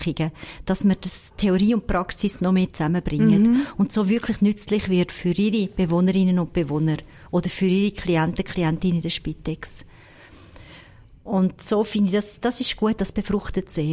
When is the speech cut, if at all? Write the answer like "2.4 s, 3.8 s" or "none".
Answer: none